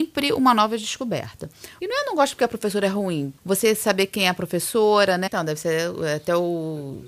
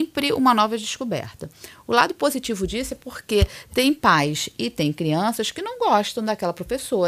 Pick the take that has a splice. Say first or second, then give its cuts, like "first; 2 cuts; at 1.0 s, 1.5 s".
first; 3 cuts; at 1.8 s, 3.4 s, 5.3 s